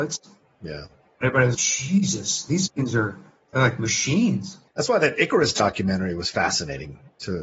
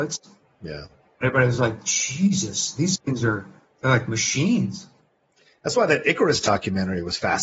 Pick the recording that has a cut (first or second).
first